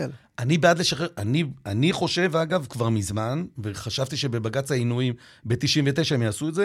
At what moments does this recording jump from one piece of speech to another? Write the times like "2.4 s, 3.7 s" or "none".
none